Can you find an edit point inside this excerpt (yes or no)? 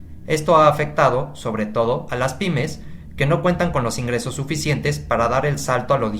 no